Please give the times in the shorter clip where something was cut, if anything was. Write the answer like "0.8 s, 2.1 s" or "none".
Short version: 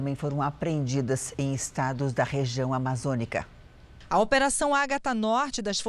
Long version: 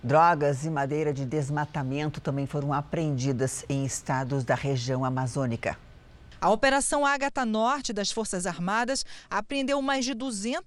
none